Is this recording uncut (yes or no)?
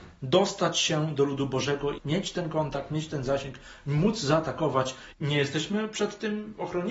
no